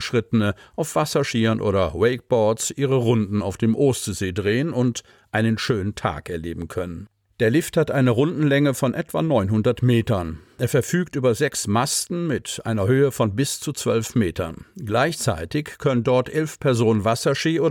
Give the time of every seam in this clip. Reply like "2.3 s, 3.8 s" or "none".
none